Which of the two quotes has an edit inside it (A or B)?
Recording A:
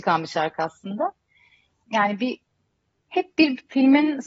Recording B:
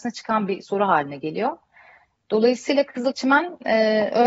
A